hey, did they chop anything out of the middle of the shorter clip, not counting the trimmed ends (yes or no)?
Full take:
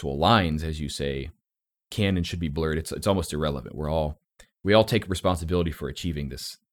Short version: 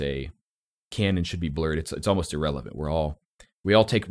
no